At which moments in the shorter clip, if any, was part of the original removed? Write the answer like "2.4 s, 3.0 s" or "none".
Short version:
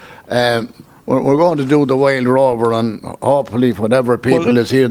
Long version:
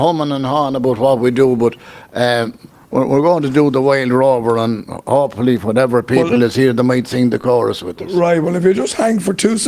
none